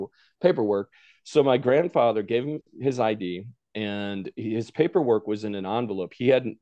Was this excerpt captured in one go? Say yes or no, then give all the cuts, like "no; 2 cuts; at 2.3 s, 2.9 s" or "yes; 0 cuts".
yes; 0 cuts